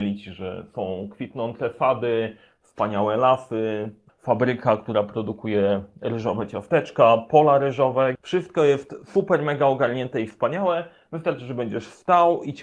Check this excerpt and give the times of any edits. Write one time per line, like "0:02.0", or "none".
0:04.1
0:08.2